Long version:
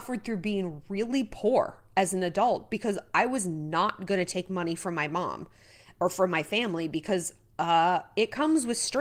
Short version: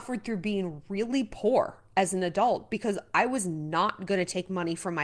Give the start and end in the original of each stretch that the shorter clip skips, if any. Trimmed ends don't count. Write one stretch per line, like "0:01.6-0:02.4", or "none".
none

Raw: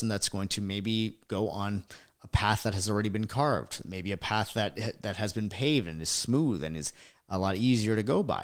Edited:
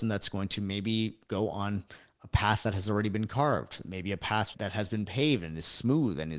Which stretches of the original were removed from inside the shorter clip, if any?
0:04.5-0:05.0

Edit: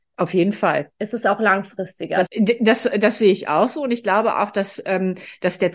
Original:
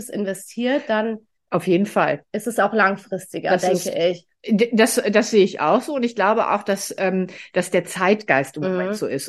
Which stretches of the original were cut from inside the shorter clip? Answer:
0:03.6-0:04.4

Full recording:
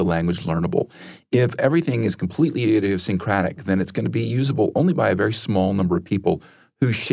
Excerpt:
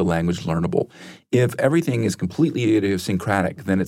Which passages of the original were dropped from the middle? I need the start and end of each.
none

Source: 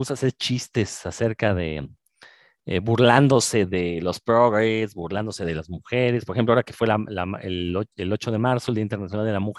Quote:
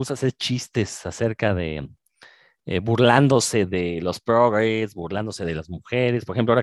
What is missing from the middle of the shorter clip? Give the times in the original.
none

